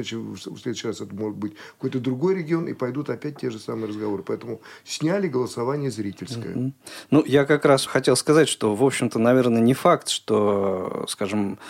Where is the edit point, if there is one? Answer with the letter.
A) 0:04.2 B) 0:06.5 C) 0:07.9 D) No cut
C